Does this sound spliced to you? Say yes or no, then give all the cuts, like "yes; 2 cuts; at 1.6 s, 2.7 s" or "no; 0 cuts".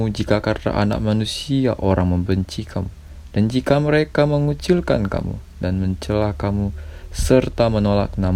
no; 0 cuts